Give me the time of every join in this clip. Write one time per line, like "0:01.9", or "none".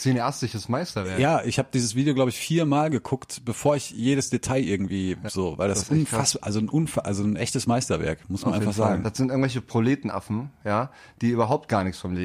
0:05.3
0:09.0